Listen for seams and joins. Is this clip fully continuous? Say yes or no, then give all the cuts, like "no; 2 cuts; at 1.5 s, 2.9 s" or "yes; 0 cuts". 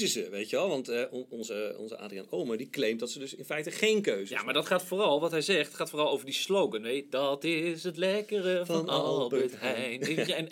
yes; 0 cuts